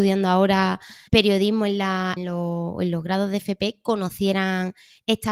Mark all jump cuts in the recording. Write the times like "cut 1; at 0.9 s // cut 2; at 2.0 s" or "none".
cut 1; at 1.1 s // cut 2; at 2.2 s